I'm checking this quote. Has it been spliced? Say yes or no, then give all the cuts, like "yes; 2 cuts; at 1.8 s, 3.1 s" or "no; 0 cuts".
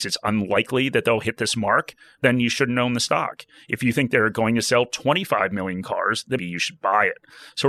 yes; 1 cut; at 6.4 s